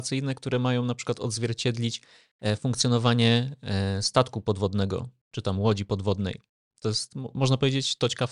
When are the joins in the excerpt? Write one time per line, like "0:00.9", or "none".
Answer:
none